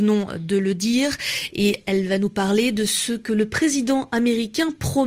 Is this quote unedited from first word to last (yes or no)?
yes